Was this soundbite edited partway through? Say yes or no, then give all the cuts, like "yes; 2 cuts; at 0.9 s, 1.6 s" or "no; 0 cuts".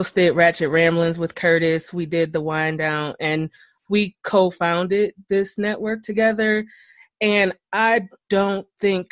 no; 0 cuts